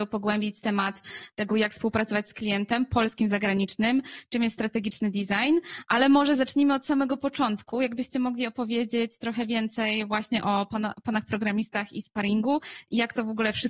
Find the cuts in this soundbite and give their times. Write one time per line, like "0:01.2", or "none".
none